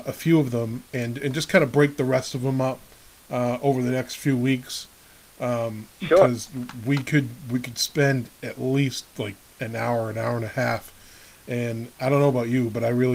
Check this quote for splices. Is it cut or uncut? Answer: uncut